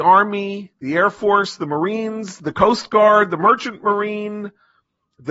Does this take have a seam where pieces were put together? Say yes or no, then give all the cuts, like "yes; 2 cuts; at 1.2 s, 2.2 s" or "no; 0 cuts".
no; 0 cuts